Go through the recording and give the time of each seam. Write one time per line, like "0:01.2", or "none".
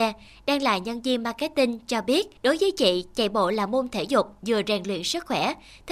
0:02.4